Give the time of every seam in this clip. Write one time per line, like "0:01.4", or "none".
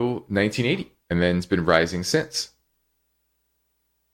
0:01.0